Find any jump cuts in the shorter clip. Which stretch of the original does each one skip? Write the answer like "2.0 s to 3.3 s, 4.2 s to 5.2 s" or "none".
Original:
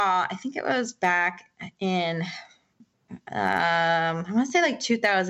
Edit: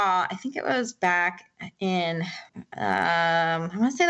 2.5 s to 3.0 s